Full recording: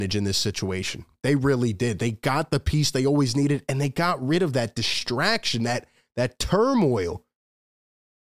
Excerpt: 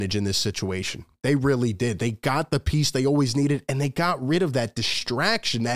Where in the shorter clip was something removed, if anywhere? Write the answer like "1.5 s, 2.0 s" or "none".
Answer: none